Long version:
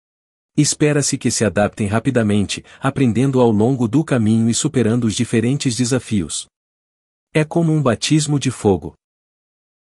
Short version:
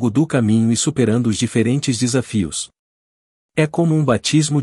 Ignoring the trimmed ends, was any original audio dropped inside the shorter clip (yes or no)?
no